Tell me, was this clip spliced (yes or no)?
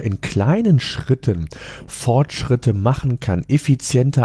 no